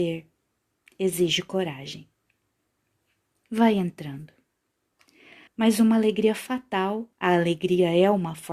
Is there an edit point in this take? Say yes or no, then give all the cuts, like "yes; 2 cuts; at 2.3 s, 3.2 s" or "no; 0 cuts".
yes; 2 cuts; at 5.5 s, 7.1 s